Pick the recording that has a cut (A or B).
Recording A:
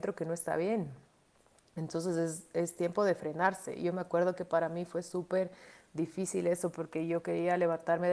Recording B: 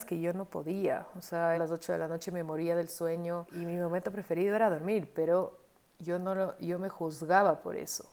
B